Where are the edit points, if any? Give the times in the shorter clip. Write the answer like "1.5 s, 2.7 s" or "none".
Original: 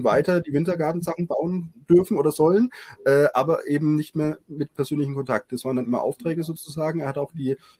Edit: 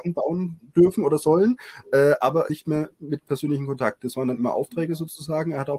2.5 s